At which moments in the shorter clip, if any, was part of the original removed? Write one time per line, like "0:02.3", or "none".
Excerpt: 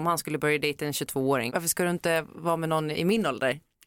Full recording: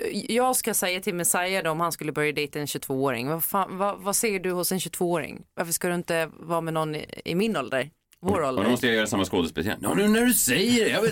0:01.5
0:02.9